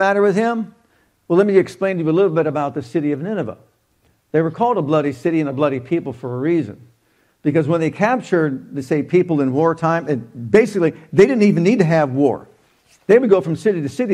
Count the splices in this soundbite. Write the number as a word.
zero